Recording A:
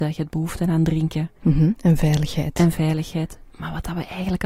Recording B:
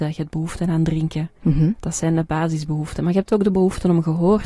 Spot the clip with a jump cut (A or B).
A